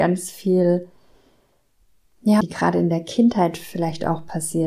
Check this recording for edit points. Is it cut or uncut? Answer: cut